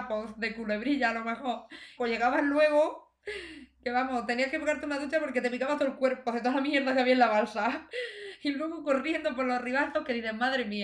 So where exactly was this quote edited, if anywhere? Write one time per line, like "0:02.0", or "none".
0:02.0